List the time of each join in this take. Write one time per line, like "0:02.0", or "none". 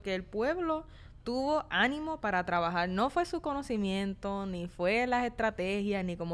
none